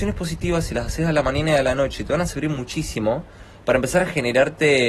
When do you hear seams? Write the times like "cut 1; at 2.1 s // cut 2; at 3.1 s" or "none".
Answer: none